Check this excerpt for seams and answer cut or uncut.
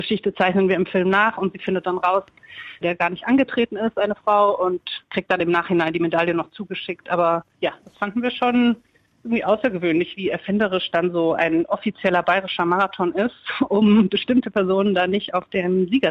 cut